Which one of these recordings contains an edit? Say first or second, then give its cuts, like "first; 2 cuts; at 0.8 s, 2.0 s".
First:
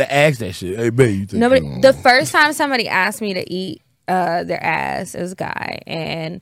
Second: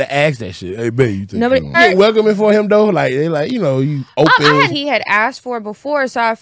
second; 2 cuts; at 1.7 s, 4.7 s